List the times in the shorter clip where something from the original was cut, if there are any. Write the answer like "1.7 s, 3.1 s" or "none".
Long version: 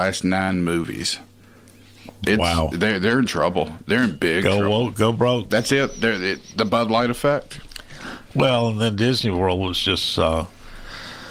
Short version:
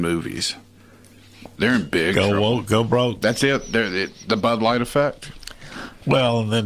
1.6 s